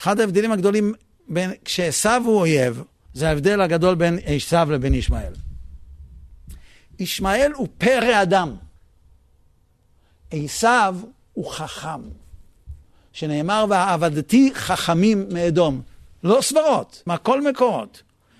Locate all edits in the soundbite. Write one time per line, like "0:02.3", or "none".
0:03.1
0:17.1